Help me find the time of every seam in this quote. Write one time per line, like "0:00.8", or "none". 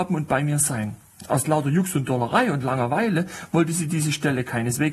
none